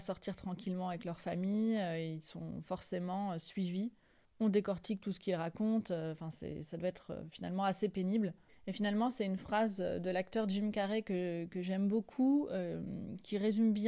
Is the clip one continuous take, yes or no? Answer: no